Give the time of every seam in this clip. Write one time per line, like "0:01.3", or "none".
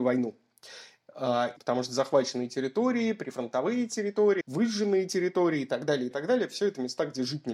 0:01.6
0:04.4
0:06.1